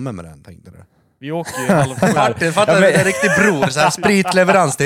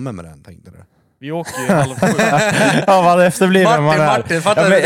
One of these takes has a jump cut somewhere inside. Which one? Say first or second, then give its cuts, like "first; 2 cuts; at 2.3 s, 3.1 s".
first; 1 cut; at 2.2 s